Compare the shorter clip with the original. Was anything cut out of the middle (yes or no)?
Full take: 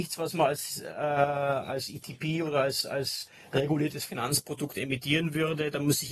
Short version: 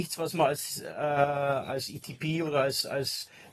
no